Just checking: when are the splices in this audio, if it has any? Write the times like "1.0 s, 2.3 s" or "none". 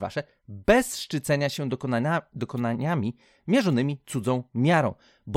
none